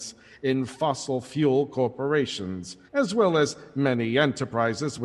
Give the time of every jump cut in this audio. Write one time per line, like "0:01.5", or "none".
0:02.9

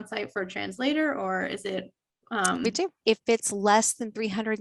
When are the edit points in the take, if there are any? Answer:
0:03.0

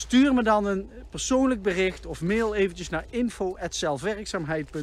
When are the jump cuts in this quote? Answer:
none

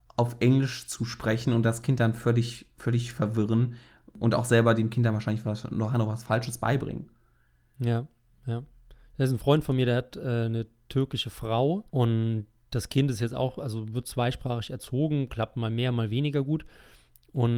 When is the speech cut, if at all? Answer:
0:11.9

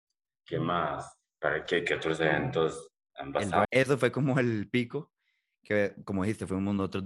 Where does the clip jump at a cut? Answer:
0:03.6

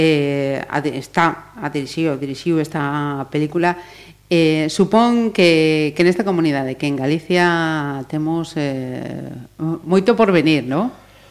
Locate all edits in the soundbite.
0:09.8

